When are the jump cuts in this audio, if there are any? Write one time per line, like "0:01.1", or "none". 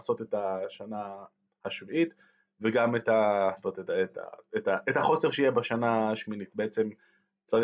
none